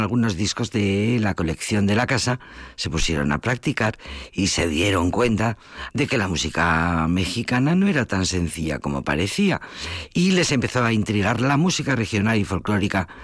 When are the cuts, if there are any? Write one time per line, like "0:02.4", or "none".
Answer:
0:05.9